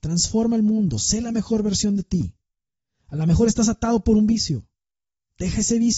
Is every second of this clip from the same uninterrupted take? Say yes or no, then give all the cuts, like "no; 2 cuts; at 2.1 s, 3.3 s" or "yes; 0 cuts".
yes; 0 cuts